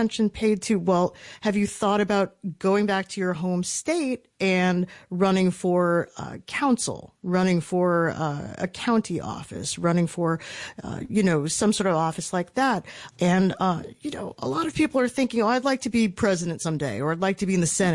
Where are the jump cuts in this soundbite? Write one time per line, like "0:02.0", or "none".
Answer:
0:13.1